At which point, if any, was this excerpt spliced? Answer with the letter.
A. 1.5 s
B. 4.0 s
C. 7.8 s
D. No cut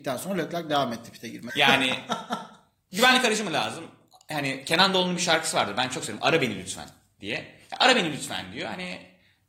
A